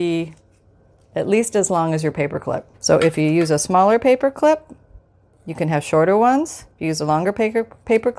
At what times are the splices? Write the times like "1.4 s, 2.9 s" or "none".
2.7 s

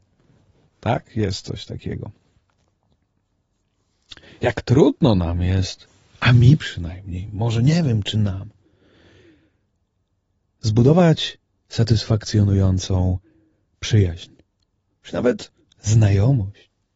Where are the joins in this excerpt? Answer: none

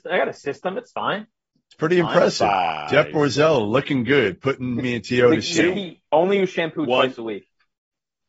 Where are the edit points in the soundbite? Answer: none

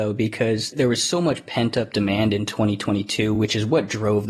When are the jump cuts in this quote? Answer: none

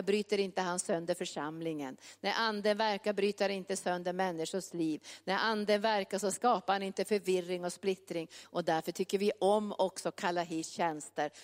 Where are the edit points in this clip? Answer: 8.4 s

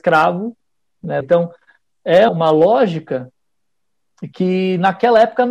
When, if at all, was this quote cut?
1.2 s, 2.3 s

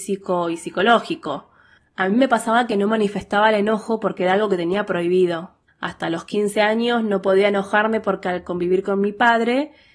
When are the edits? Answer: 1.8 s, 5.7 s

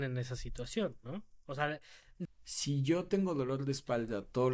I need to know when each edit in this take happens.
2.3 s

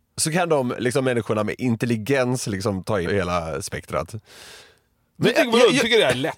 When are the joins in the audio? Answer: 3.1 s, 4.6 s

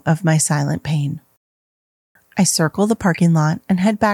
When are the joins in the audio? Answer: 2.2 s

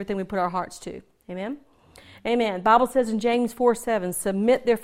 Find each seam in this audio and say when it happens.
none

